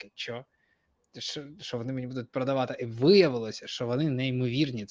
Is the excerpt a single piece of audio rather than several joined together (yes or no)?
yes